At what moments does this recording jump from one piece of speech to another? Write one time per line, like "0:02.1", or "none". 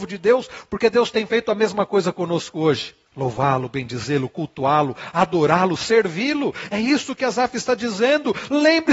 0:03.1